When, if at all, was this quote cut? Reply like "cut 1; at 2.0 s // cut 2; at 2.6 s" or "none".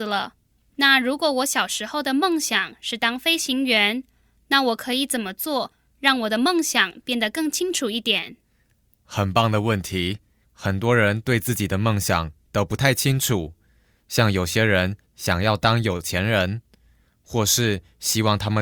cut 1; at 10.4 s